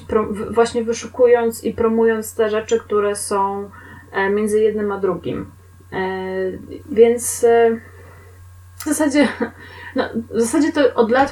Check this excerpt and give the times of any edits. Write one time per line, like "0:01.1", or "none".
0:06.8
0:08.9